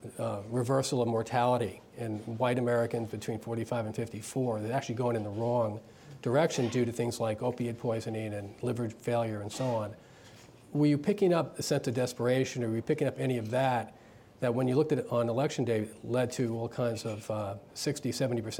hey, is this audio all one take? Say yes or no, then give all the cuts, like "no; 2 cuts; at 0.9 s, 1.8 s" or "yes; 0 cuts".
yes; 0 cuts